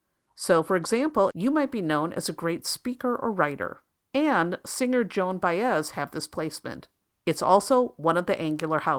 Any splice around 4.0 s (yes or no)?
yes